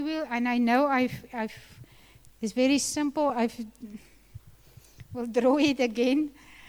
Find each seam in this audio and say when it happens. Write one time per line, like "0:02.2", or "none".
none